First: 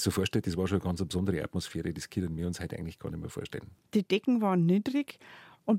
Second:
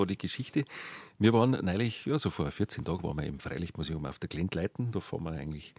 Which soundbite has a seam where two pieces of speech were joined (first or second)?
first